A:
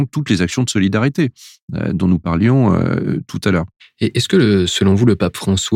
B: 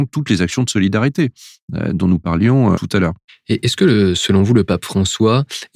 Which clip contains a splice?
B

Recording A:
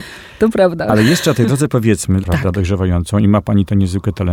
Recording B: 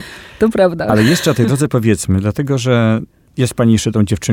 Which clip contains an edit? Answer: A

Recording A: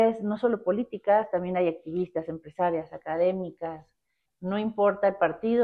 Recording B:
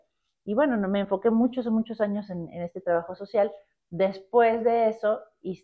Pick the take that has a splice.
A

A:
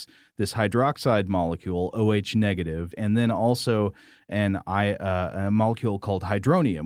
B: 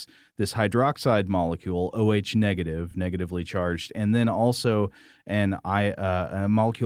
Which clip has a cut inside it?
A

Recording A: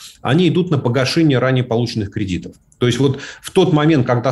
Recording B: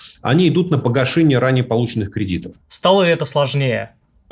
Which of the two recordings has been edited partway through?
B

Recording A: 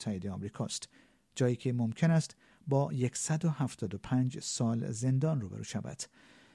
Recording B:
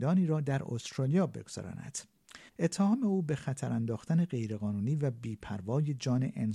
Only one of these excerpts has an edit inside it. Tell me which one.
B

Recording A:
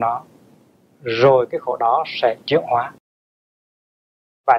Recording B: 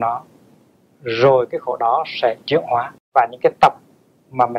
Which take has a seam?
B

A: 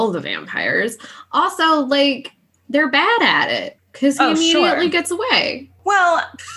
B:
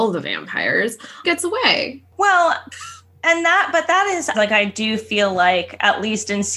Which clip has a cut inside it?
B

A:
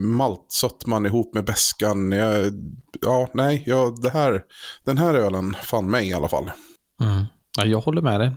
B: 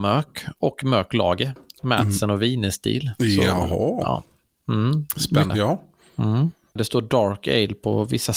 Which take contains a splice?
B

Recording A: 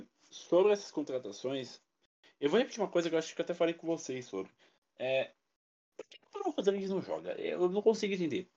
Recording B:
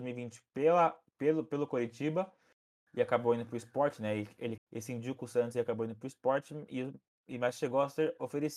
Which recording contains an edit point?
B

